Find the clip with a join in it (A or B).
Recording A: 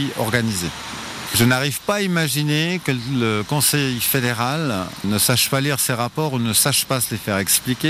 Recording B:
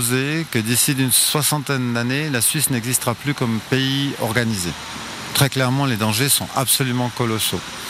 A